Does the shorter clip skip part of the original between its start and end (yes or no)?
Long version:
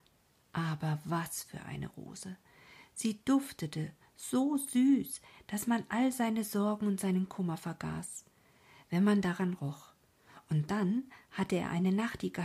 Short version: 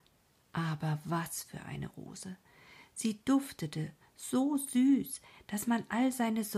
no